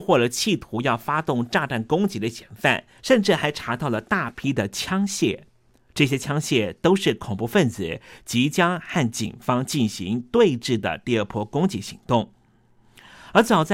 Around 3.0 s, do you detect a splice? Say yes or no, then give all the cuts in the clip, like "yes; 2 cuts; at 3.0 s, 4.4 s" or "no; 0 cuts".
yes; 1 cut; at 3.0 s